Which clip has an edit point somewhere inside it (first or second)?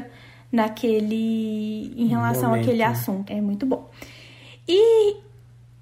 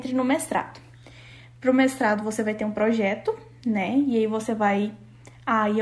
first